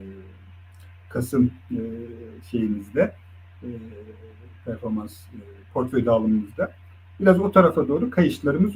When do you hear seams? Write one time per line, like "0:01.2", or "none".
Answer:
none